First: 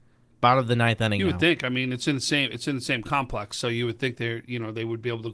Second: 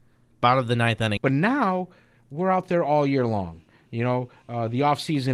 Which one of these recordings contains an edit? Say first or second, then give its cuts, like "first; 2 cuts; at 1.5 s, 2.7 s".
second; 1 cut; at 1.2 s